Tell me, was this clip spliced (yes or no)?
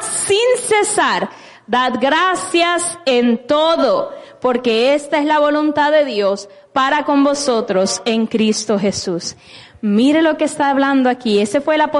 no